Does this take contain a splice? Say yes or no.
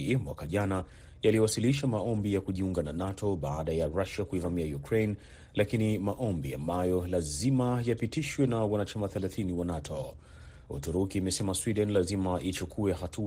yes